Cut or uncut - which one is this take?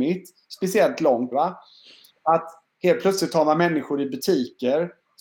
cut